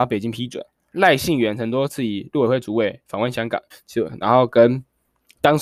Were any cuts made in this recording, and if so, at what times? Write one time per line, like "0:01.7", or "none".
0:00.9
0:03.7